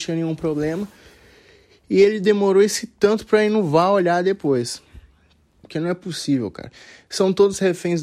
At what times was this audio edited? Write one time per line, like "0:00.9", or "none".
0:05.6